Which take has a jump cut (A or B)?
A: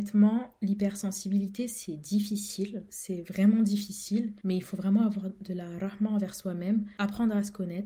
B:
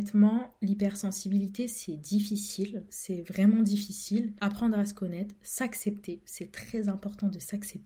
B